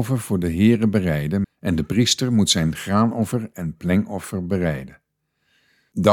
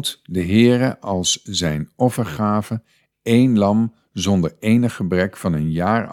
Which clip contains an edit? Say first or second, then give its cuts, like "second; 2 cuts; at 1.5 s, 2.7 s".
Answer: first; 1 cut; at 1.4 s